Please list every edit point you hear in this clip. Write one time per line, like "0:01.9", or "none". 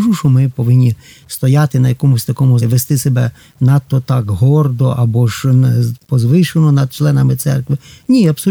0:02.6